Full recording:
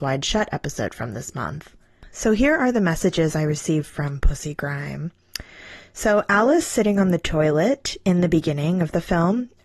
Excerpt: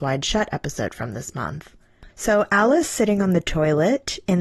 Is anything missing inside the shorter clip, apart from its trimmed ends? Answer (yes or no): yes